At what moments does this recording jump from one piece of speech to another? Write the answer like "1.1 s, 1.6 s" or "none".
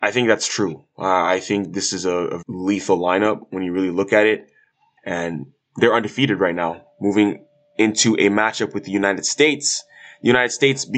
2.4 s, 5.0 s